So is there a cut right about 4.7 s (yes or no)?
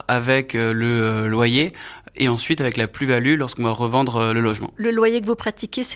no